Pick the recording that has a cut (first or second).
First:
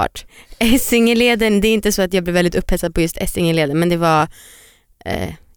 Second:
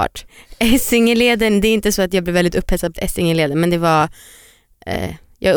second